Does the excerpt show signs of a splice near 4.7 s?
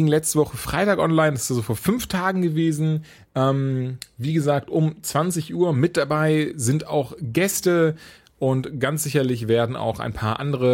no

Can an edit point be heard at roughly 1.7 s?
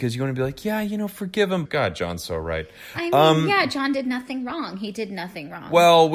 yes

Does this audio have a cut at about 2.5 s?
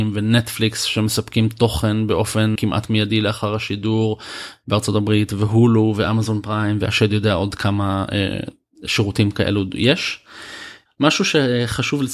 yes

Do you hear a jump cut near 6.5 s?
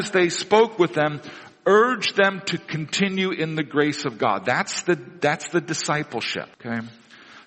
yes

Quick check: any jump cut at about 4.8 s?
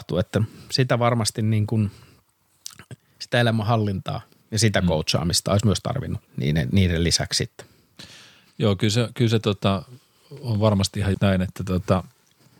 no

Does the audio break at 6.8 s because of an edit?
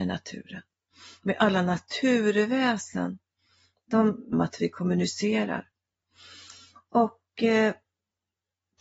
no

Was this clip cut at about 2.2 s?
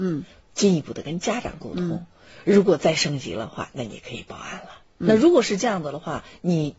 no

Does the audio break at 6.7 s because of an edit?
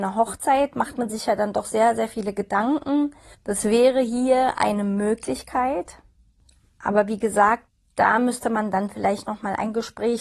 no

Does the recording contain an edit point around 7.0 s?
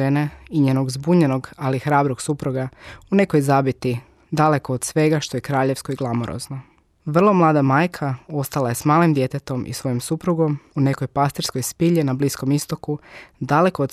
yes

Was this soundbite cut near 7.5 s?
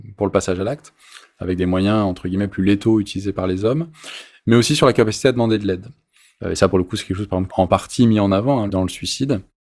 yes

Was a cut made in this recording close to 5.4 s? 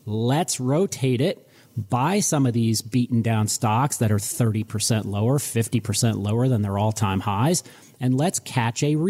yes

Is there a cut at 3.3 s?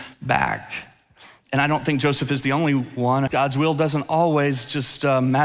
yes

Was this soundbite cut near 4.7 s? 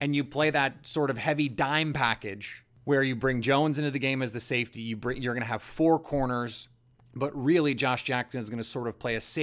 no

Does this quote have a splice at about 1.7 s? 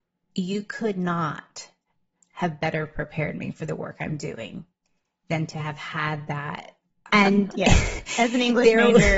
no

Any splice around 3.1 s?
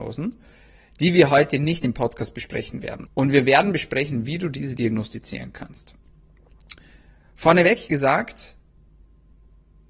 yes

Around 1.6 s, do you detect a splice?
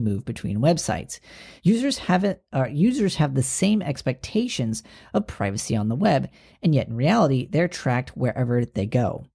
yes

